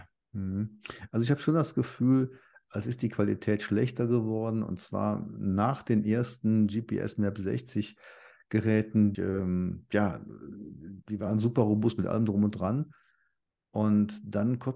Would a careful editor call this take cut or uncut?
cut